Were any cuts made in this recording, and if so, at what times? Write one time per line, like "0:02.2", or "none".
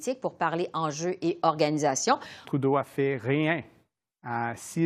0:02.4

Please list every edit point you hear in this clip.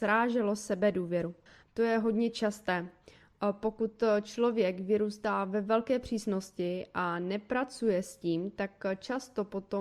0:01.6

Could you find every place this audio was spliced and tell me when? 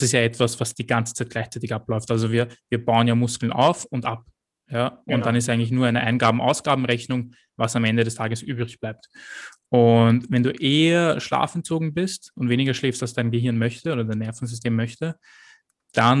none

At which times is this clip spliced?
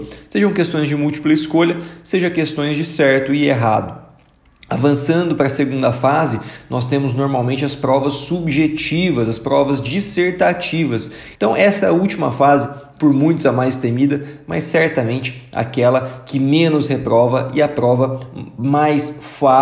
0:11.4

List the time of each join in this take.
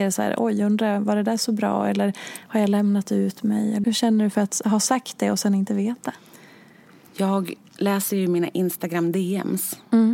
0:03.8

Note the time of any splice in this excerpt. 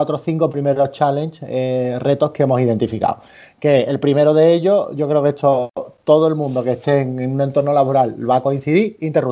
none

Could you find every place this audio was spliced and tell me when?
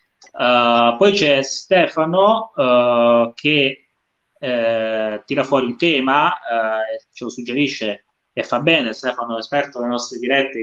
none

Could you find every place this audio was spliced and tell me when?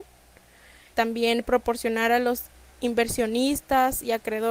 0:00.9

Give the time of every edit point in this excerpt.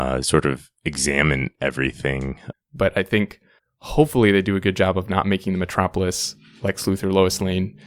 0:02.5

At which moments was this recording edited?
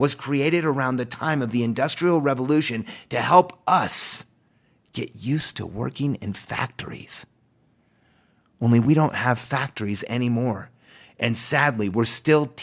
none

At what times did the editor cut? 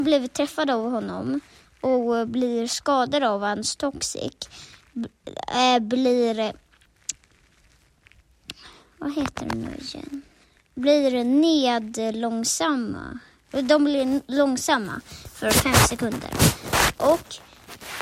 0:16.9

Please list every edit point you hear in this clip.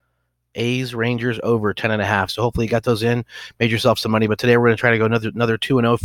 0:02.3

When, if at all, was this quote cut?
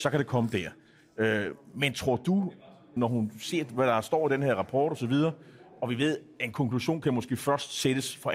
0:03.0

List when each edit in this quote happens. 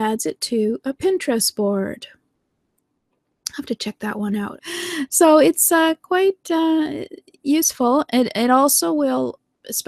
0:04.6

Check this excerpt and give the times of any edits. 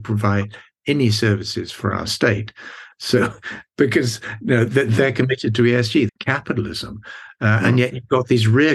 0:02.9
0:06.1

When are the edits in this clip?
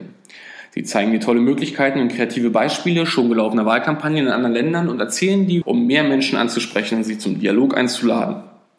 0:05.6

